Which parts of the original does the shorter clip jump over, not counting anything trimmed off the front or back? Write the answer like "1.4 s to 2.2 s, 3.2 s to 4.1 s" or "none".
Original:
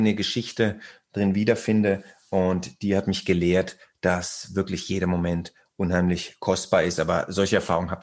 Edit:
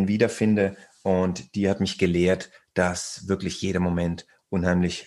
none